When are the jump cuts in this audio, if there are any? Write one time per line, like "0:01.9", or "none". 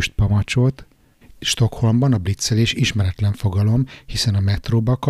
0:01.2